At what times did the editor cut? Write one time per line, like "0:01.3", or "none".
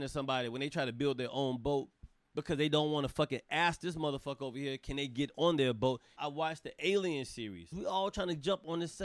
0:06.2
0:07.7